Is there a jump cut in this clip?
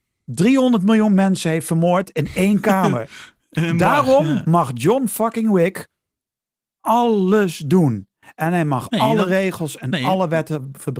no; 0 cuts

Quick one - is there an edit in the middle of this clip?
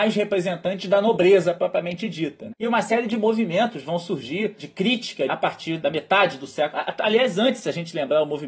yes; 2 cuts; at 2.5 s, 5.3 s

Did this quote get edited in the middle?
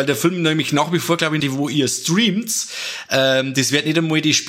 yes; 1 cut; at 1.4 s

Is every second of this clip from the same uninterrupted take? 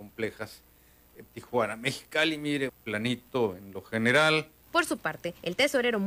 no; 3 cuts; at 1.3 s, 2.7 s, 4.6 s

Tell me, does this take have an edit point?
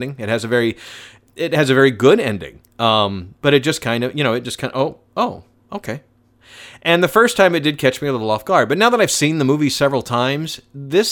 no; 0 cuts

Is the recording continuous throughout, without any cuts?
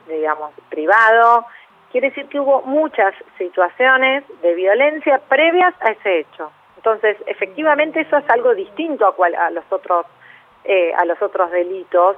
yes; 0 cuts

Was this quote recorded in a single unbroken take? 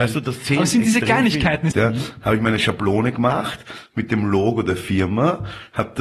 no; 1 cut; at 1.7 s

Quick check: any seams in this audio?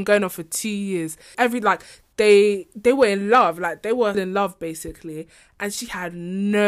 yes; 2 cuts; at 1.3 s, 4.1 s

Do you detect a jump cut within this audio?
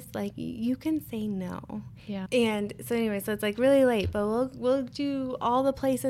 yes; 1 cut; at 2.3 s

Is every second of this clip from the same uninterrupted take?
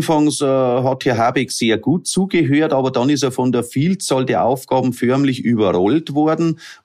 yes; 0 cuts

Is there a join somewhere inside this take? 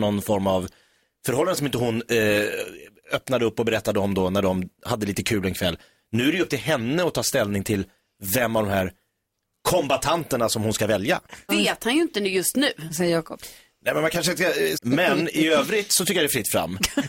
yes; 2 cuts; at 11.5 s, 14.7 s

